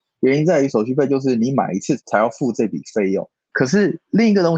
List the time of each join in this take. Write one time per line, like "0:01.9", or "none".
0:03.5